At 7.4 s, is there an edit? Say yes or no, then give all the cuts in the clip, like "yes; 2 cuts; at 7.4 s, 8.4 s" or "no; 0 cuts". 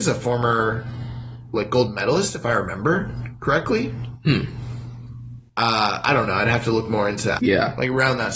yes; 2 cuts; at 5.5 s, 7.4 s